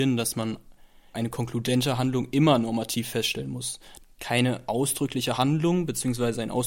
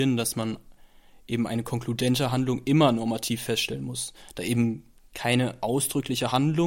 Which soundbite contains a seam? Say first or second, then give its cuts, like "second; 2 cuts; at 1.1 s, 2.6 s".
first; 2 cuts; at 1.1 s, 4.0 s